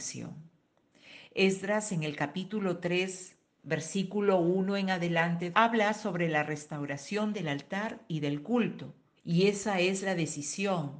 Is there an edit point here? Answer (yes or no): yes